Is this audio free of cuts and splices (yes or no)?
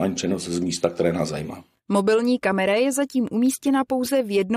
yes